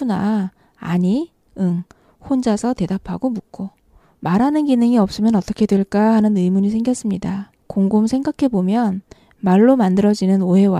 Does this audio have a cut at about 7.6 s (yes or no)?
yes